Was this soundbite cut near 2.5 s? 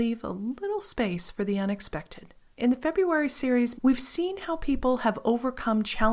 yes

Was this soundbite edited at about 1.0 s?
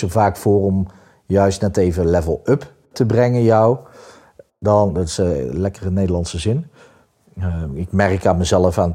no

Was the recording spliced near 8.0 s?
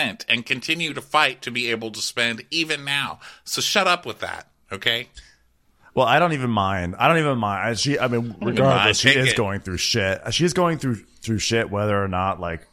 no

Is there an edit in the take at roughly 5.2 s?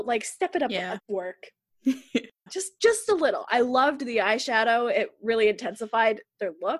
no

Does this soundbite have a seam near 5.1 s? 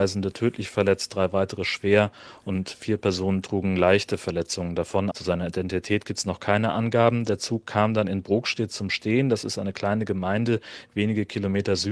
yes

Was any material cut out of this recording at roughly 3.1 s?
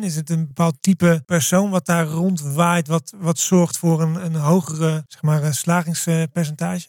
yes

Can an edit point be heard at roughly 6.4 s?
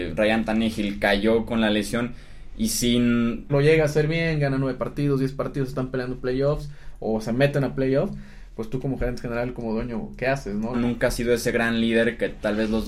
no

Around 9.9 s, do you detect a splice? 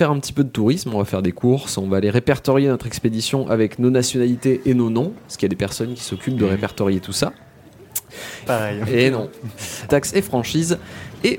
yes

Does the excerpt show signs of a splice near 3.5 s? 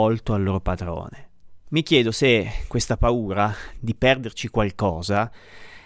no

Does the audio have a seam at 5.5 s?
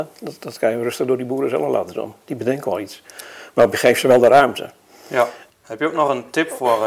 yes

